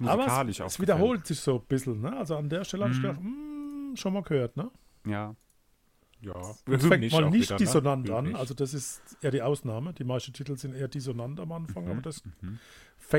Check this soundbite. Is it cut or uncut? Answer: uncut